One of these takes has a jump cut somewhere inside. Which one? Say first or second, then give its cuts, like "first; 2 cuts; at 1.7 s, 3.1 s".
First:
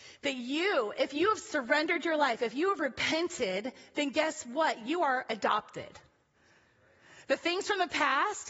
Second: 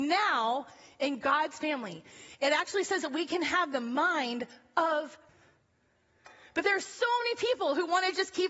second; 1 cut; at 5.3 s